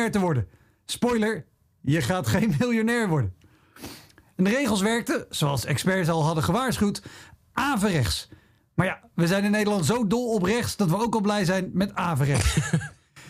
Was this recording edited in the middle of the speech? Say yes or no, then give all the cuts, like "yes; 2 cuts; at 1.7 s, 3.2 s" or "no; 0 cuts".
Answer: no; 0 cuts